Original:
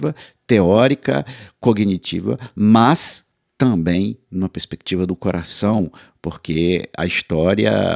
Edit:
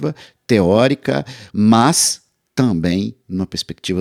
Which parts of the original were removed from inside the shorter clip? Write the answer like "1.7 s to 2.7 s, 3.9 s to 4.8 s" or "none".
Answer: 1.5 s to 2.5 s